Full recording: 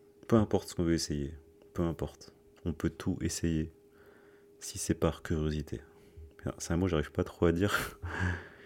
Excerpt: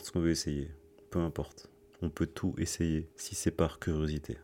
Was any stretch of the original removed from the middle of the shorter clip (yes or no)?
yes